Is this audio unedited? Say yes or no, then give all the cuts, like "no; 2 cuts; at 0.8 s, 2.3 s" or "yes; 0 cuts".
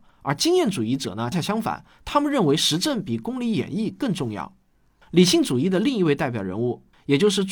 no; 1 cut; at 1.3 s